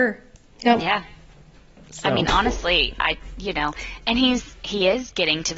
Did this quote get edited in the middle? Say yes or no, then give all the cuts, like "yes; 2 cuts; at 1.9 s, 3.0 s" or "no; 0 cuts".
no; 0 cuts